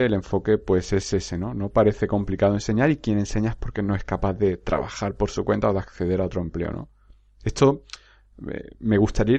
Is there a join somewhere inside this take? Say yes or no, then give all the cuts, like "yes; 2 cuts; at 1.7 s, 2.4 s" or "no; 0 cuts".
no; 0 cuts